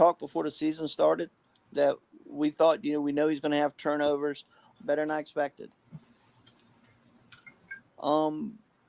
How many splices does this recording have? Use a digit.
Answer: 2